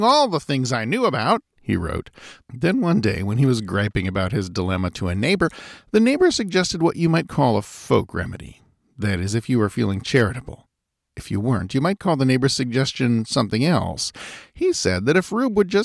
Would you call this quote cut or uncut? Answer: cut